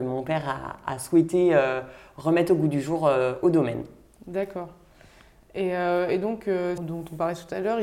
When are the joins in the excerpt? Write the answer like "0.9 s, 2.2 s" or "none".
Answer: 6.8 s